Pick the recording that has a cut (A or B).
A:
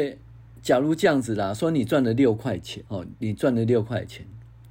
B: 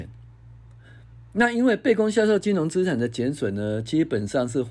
A